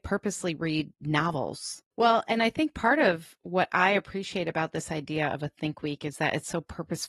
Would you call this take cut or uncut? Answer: cut